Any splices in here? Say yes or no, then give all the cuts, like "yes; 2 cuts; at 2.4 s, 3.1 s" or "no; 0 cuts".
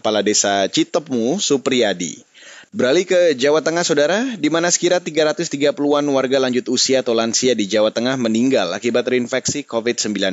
yes; 1 cut; at 2.6 s